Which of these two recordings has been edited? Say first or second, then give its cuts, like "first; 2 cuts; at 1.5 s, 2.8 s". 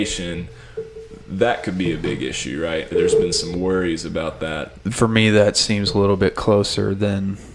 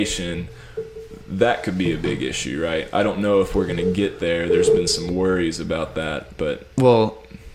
first; 2 cuts; at 2.9 s, 4.8 s